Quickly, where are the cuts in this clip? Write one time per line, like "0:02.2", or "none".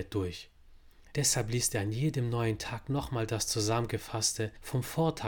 0:01.1